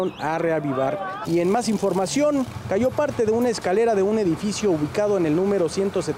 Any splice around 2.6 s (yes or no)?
no